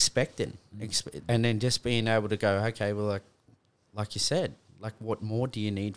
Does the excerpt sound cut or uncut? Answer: cut